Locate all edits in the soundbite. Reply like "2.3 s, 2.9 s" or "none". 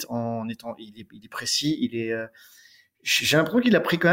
none